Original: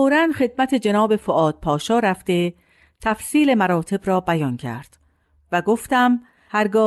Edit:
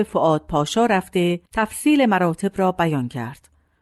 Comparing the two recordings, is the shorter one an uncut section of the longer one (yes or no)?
no